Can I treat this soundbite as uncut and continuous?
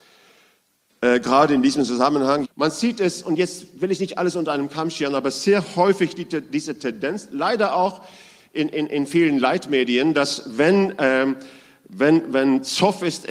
no; 1 cut; at 2.4 s

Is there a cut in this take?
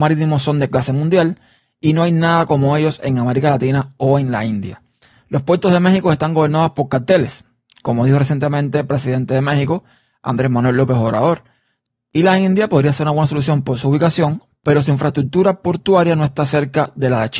no; 0 cuts

